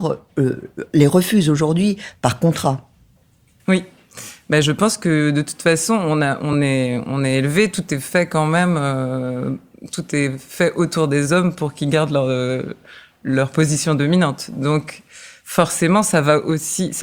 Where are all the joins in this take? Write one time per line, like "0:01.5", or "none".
none